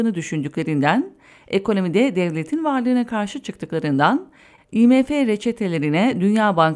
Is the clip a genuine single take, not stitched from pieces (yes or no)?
yes